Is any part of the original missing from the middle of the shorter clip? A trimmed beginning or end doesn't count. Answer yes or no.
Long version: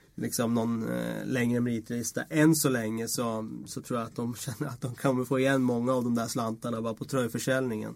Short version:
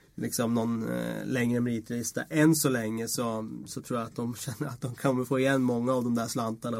no